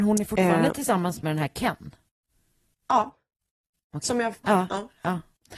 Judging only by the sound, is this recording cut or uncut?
cut